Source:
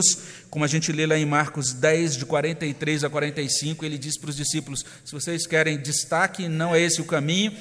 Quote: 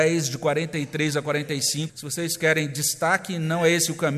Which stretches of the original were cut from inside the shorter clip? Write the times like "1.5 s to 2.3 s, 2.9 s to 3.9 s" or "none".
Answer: 3.8 s to 5.0 s

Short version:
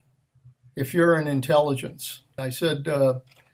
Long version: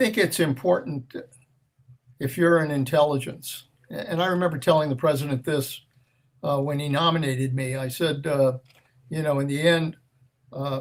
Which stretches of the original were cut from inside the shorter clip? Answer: 3.8 s to 7.8 s

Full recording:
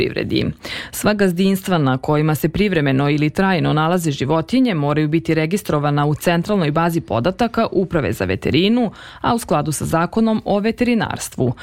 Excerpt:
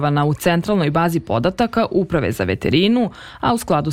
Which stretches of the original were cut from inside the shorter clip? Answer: none

